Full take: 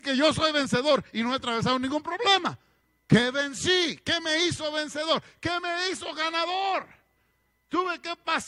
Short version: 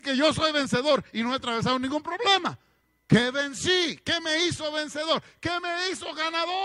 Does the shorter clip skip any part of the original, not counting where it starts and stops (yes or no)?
no